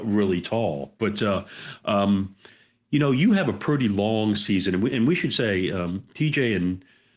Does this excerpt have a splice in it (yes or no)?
no